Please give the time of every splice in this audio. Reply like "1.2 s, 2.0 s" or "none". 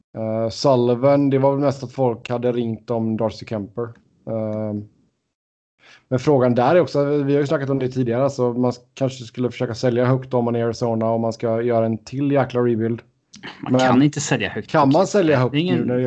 none